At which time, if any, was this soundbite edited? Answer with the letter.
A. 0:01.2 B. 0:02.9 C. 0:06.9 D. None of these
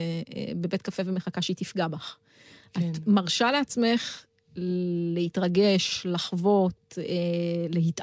D